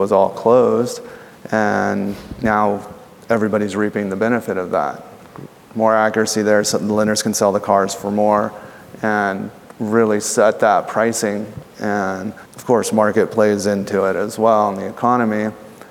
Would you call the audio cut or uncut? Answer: cut